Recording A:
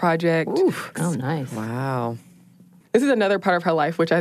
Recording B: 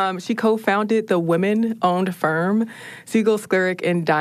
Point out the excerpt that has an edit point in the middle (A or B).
A